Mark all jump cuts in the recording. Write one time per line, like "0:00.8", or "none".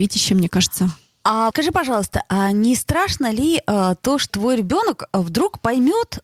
0:01.5
0:04.3